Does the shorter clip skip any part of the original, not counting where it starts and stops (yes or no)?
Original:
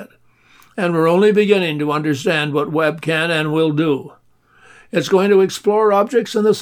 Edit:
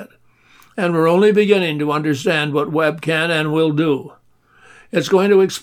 no